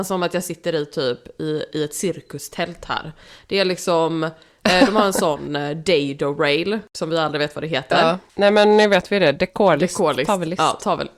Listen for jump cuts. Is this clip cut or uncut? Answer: uncut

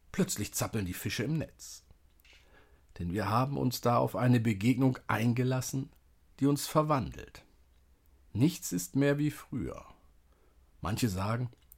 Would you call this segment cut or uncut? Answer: uncut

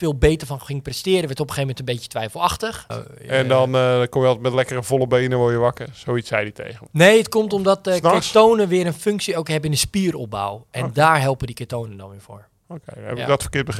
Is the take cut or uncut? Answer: cut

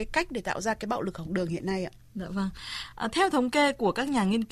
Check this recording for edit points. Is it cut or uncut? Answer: uncut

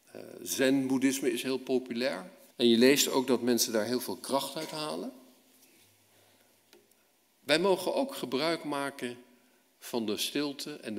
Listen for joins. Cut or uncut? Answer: cut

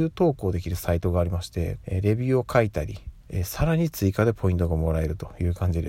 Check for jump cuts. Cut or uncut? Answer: cut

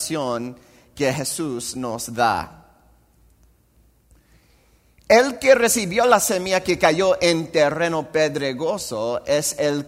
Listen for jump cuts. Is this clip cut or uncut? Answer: uncut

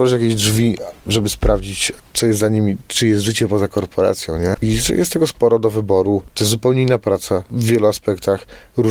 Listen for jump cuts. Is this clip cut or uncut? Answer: cut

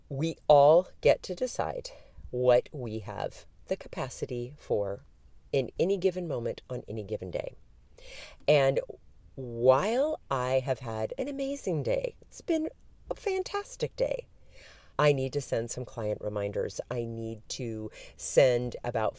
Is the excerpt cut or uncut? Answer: cut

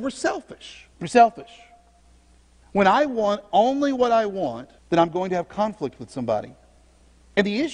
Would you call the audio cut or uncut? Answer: cut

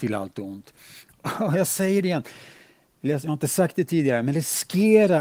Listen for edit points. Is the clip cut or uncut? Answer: cut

